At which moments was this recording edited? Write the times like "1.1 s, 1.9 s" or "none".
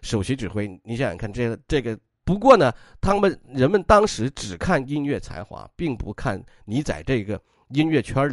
2.2 s